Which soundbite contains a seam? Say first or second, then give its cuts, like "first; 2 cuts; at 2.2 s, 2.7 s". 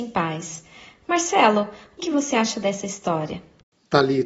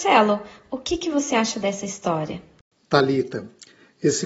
first; 1 cut; at 2.0 s